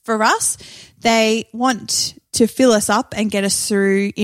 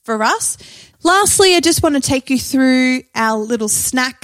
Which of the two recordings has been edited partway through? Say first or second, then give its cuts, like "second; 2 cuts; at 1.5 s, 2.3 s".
second; 1 cut; at 0.9 s